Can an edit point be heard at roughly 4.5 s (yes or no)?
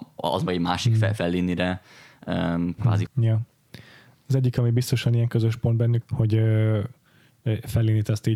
no